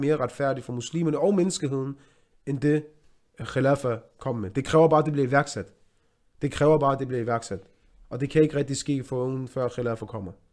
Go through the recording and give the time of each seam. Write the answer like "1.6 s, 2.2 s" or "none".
none

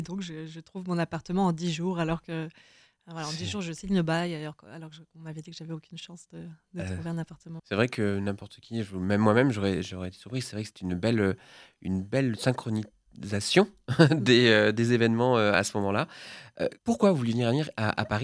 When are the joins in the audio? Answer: 7.6 s, 16.8 s

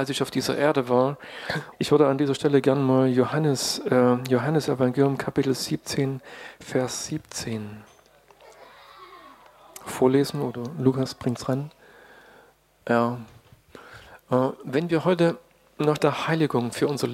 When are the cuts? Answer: 1.7 s

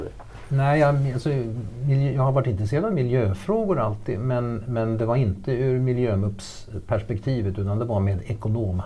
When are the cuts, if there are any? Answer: none

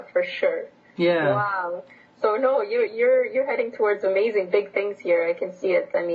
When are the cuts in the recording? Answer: none

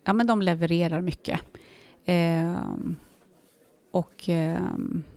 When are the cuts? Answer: none

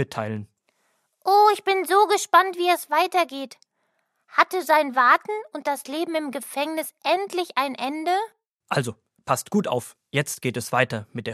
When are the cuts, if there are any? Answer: none

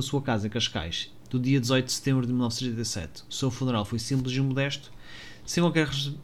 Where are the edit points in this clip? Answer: 1.2 s

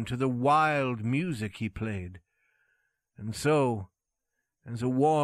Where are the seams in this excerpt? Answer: none

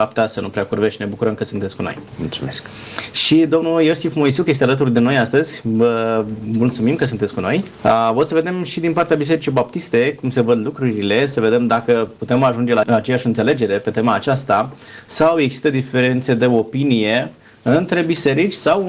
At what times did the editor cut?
7.8 s, 12.8 s

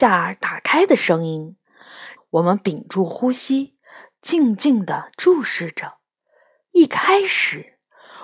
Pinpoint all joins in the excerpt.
2.2 s

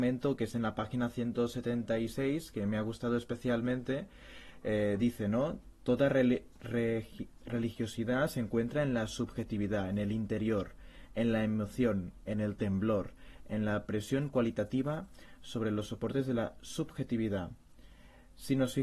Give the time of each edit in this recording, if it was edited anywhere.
none

